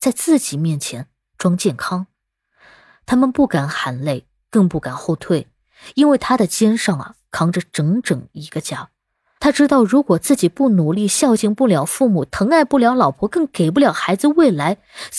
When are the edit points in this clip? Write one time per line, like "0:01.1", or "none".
none